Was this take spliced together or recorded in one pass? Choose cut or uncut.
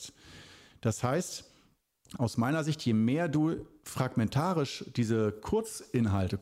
uncut